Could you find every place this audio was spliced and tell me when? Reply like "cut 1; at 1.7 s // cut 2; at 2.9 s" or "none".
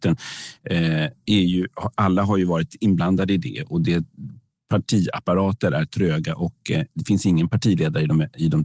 none